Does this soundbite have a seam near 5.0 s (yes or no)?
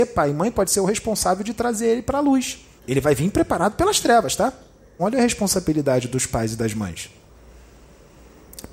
yes